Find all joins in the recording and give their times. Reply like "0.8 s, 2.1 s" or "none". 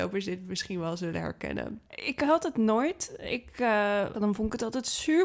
1.9 s, 4.1 s